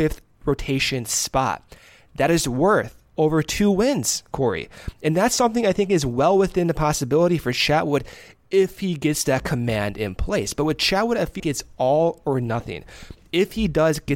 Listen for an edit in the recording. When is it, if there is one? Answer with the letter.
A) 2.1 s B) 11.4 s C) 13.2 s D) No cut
B